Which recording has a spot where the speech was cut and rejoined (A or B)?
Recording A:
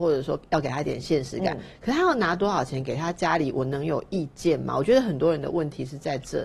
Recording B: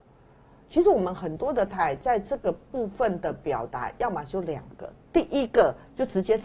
B